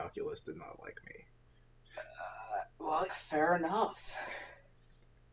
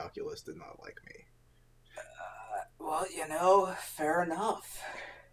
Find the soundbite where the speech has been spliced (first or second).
first